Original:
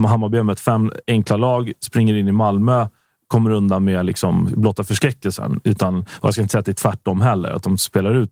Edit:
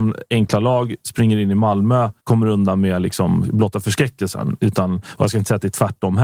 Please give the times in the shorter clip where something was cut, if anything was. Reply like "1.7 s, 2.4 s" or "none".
2.2 s